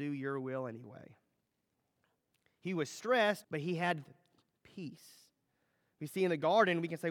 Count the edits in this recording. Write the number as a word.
one